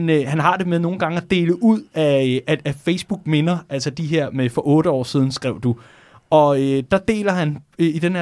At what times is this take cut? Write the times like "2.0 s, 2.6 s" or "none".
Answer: none